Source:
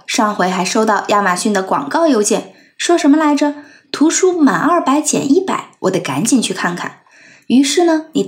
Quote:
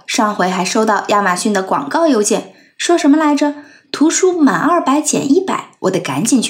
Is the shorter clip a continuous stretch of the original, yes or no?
yes